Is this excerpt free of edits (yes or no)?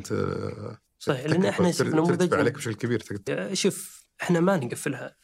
no